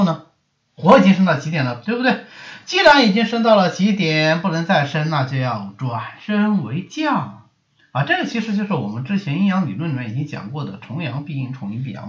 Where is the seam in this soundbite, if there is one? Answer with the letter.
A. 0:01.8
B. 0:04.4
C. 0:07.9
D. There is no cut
A